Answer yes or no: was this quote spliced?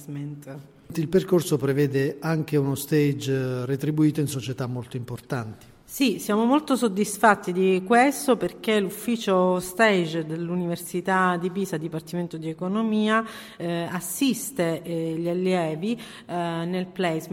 no